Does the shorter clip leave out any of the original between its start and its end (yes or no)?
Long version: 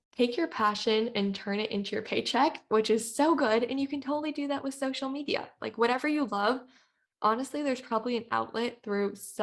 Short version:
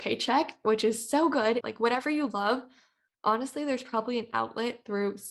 yes